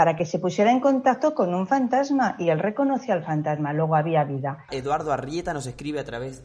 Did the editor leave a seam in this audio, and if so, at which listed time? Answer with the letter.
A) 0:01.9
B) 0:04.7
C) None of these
B